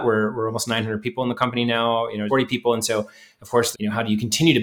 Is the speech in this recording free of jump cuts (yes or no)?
no